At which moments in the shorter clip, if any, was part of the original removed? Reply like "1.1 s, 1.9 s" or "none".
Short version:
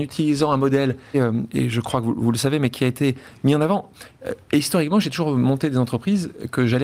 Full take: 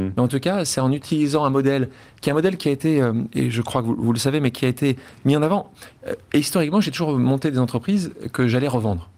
1.1 s